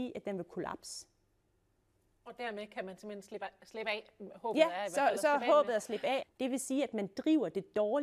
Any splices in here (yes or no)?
yes